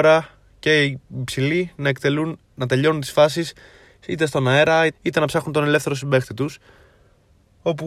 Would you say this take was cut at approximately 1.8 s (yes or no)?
no